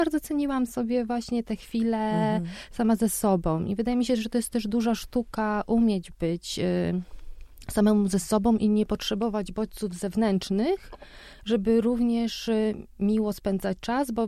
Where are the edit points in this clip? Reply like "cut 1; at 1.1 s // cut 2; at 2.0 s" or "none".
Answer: none